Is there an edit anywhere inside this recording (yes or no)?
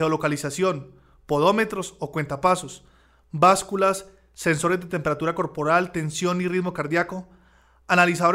no